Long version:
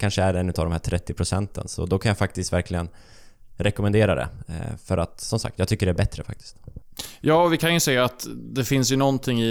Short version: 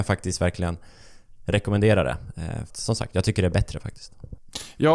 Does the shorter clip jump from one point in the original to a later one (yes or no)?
yes